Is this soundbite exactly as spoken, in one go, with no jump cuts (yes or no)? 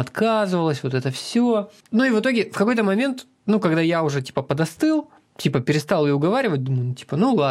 yes